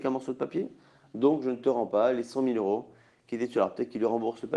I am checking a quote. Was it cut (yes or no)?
no